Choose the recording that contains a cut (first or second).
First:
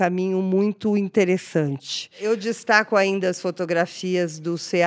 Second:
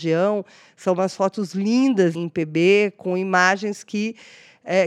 second